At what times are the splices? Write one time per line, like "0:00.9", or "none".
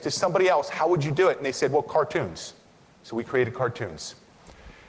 none